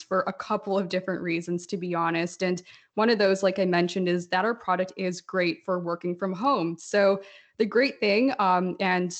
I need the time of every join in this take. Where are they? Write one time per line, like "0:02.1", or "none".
none